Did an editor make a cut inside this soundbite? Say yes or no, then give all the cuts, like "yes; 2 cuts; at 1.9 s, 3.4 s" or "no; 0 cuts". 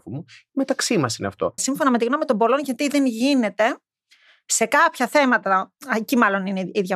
yes; 1 cut; at 1.6 s